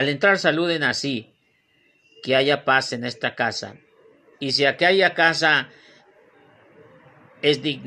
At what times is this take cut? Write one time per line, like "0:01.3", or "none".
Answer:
none